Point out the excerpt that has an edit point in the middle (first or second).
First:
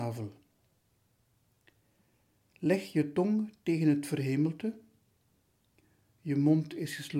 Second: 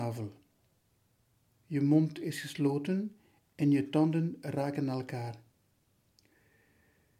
second